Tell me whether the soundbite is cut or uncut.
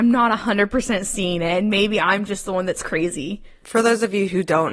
uncut